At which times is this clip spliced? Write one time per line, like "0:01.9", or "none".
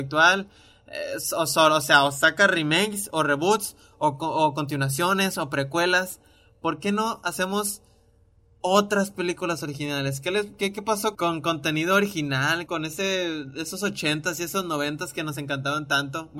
0:11.1
0:12.7